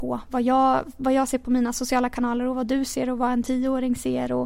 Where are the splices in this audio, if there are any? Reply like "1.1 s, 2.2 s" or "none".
none